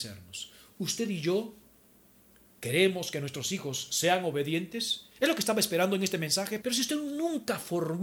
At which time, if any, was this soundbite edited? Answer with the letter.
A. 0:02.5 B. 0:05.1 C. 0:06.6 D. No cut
C